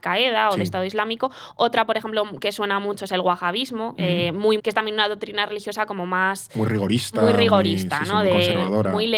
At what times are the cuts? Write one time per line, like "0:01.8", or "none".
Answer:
0:04.6